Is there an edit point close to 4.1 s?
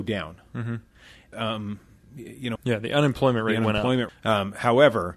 yes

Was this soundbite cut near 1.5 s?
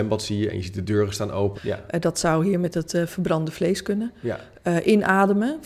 yes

